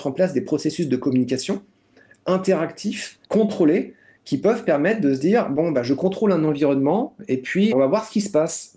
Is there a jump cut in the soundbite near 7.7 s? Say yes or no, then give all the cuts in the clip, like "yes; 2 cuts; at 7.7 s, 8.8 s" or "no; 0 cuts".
yes; 2 cuts; at 3.2 s, 7.7 s